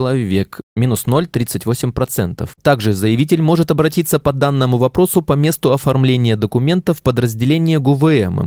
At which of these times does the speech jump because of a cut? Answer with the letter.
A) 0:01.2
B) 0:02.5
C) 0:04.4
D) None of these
B